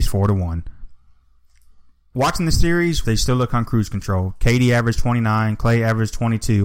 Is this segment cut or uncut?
cut